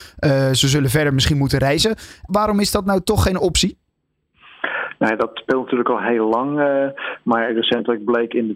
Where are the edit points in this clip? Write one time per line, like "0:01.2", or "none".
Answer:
0:02.3